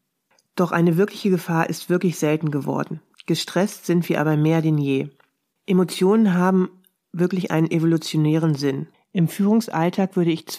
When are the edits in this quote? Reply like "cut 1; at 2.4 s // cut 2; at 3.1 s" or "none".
cut 1; at 3.1 s // cut 2; at 5.5 s // cut 3; at 8.9 s